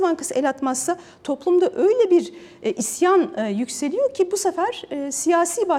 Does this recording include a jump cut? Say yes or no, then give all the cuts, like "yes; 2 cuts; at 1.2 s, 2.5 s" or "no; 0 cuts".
no; 0 cuts